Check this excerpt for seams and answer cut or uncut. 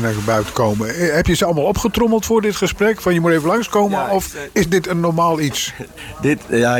uncut